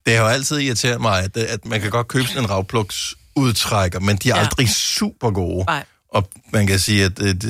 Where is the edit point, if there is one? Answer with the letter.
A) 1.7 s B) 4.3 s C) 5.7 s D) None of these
A